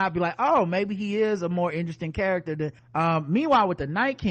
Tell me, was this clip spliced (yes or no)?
yes